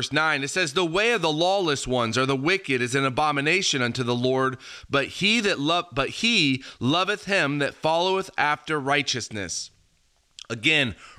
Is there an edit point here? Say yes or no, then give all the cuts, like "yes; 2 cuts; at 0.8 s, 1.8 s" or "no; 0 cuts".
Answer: no; 0 cuts